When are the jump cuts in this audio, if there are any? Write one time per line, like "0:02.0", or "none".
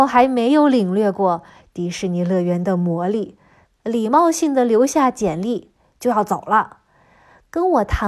0:03.6